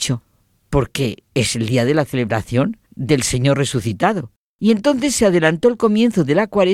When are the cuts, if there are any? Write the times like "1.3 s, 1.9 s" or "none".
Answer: 1.3 s, 2.8 s